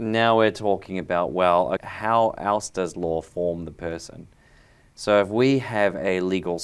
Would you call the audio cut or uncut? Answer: cut